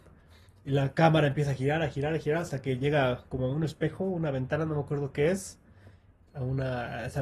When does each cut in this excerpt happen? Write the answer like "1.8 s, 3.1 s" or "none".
6.3 s